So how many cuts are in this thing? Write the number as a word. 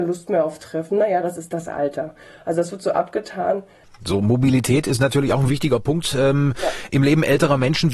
one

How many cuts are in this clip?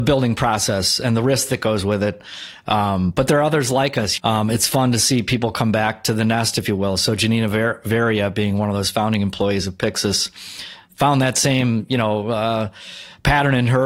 one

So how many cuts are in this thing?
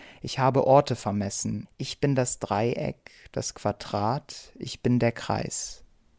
one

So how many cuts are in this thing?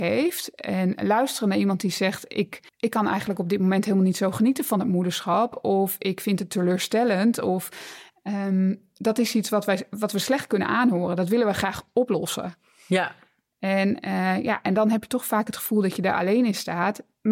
one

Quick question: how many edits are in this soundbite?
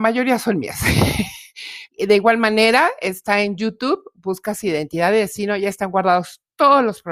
one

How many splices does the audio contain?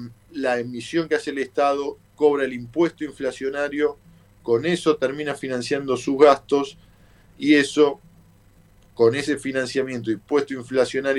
zero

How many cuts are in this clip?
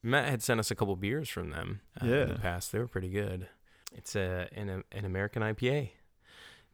two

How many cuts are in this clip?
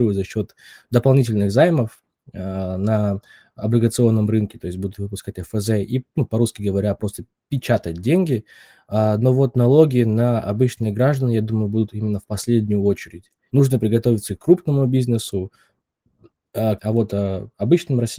two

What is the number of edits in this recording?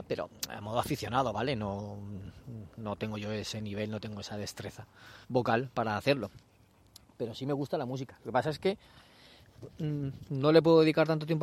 one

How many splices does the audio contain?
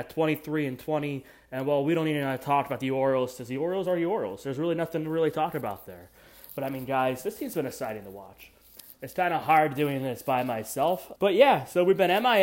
one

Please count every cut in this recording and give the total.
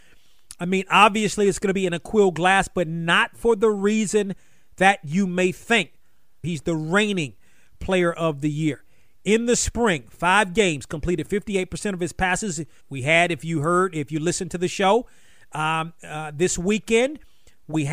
two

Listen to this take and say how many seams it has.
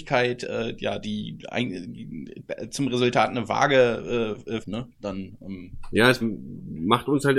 two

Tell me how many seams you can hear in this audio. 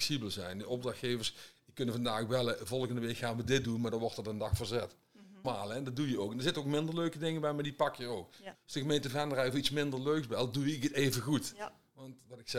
two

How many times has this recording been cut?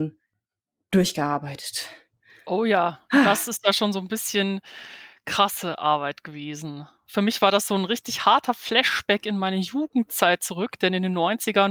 zero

